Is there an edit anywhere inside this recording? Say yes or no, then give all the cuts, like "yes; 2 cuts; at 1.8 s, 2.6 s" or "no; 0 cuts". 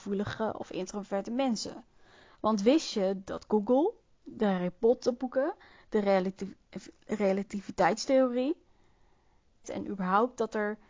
yes; 1 cut; at 9.6 s